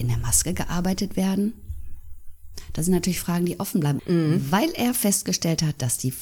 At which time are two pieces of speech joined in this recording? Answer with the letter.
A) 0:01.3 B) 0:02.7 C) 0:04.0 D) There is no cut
C